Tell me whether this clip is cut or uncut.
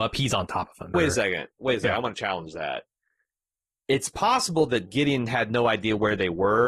cut